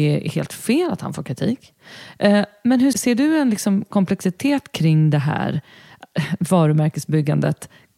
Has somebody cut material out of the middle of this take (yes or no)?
yes